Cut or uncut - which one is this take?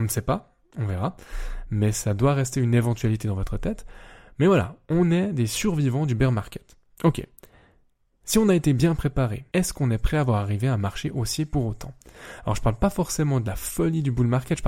cut